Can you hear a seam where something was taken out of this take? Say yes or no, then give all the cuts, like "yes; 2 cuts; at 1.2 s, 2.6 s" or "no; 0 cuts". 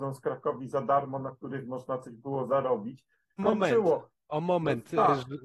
yes; 1 cut; at 3.4 s